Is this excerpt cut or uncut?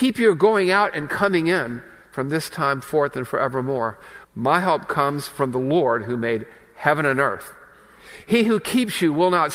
cut